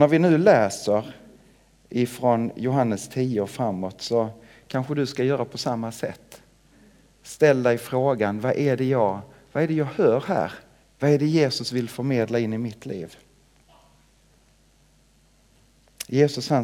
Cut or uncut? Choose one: cut